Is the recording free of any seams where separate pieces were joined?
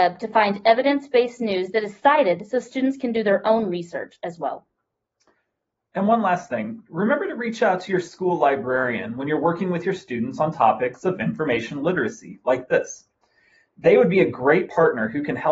yes; 0 cuts

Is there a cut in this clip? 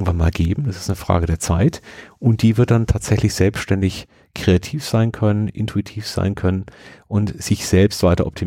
no; 0 cuts

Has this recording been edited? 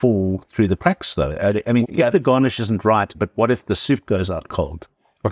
yes; 2 cuts; at 1.8 s, 3.1 s

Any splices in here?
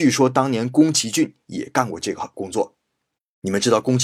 no; 0 cuts

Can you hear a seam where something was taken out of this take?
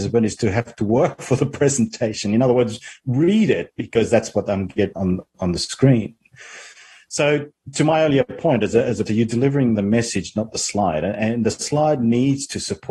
yes; 2 cuts; at 5.0 s, 9.1 s

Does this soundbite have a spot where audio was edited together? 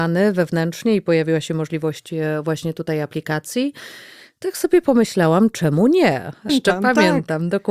yes; 1 cut; at 6.5 s

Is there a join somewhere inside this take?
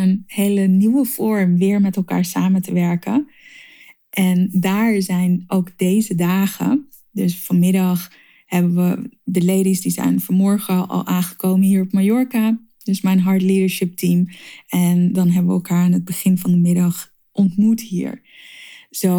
no; 0 cuts

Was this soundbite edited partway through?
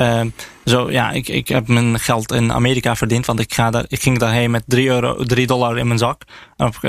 no; 0 cuts

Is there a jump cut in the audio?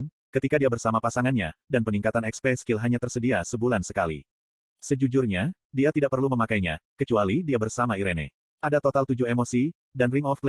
yes; 2 cuts; at 4.6 s, 8.5 s

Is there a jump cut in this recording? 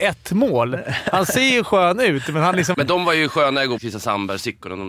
yes; 2 cuts; at 2.7 s, 3.8 s

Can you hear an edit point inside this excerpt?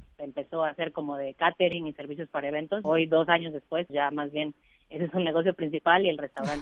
yes; 2 cuts; at 2.8 s, 3.9 s

